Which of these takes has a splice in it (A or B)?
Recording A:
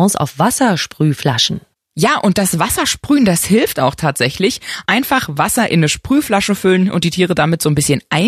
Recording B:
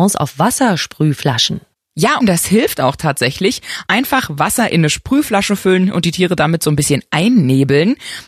B